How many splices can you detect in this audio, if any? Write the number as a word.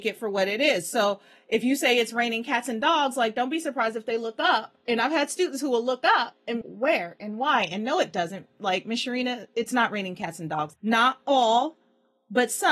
two